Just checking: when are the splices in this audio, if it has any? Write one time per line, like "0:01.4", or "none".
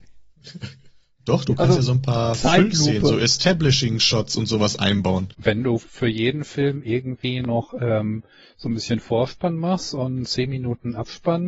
0:05.3